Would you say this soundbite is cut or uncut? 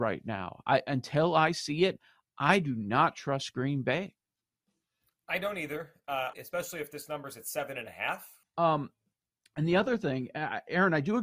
cut